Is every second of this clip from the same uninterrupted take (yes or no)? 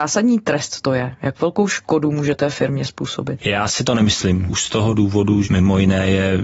no